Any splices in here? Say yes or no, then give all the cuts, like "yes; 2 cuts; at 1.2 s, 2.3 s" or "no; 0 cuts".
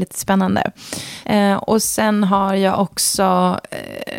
yes; 1 cut; at 1.2 s